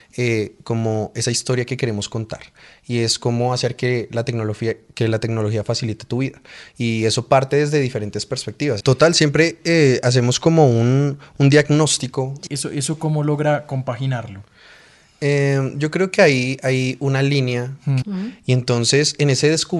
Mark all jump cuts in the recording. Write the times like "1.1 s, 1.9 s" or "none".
8.8 s, 12.5 s, 18.0 s